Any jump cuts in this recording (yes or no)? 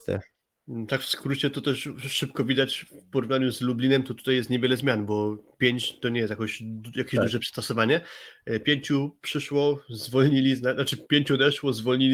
no